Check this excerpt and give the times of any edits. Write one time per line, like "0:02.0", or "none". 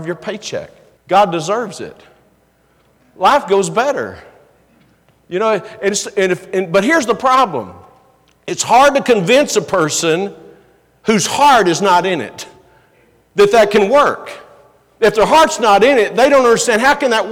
0:01.0